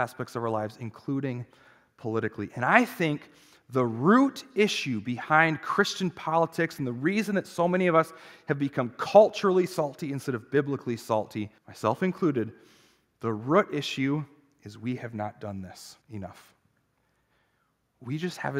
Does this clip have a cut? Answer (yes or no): yes